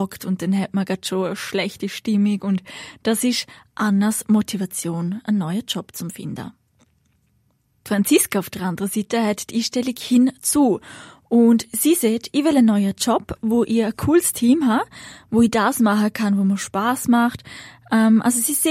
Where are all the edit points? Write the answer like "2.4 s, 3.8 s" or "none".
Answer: none